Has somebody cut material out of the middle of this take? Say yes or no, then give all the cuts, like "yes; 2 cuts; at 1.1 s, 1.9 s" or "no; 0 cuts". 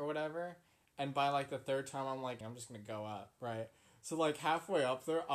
yes; 1 cut; at 2.4 s